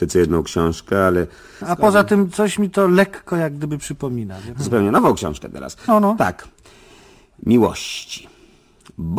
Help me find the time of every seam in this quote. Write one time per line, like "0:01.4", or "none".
0:01.6
0:04.6
0:05.9